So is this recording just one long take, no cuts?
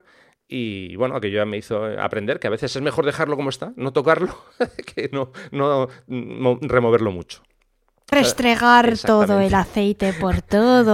no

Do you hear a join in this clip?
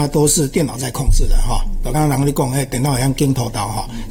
yes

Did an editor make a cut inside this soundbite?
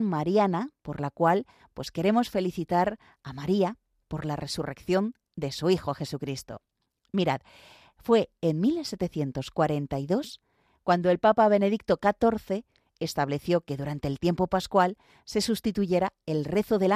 no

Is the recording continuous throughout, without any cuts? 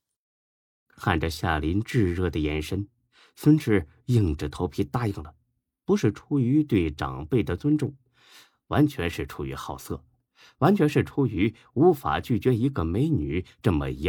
yes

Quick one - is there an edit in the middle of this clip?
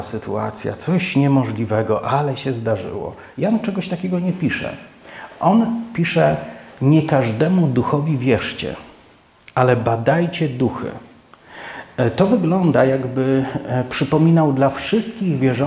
no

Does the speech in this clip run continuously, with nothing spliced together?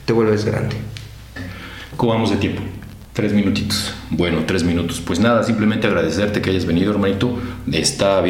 no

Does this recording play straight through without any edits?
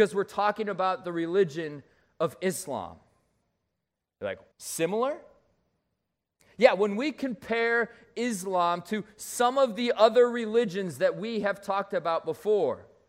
no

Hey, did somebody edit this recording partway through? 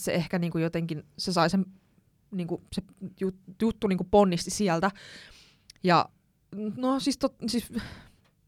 no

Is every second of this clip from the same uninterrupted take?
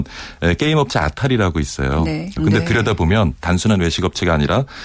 no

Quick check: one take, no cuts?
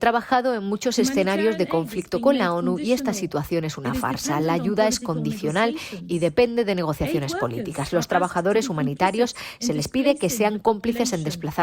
yes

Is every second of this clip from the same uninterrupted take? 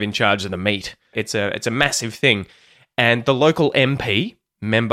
no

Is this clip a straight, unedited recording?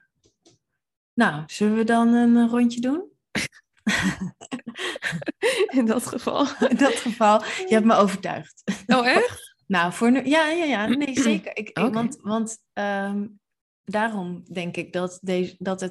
yes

